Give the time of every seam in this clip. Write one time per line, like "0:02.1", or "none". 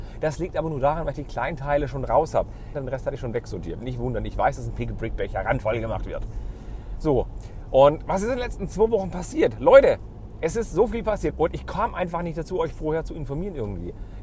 0:02.7
0:11.3